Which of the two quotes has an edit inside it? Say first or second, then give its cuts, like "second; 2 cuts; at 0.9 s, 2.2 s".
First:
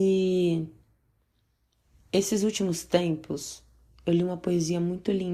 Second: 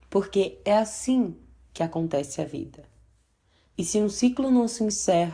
second; 1 cut; at 3.7 s